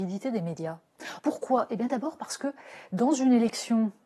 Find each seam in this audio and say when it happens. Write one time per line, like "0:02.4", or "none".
0:01.2